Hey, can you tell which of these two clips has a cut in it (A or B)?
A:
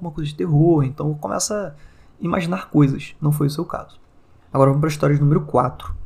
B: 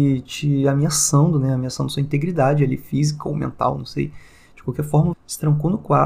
B